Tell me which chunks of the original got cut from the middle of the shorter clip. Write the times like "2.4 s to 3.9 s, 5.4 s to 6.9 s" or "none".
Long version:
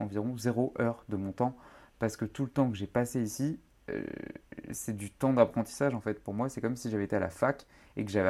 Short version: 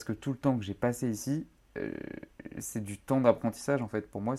none